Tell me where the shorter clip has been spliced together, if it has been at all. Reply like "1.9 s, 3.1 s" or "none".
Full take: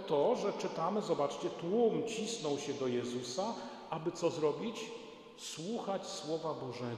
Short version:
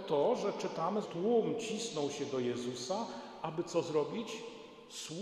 1.0 s